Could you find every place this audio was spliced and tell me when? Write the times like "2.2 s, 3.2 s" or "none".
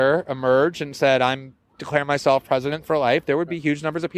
none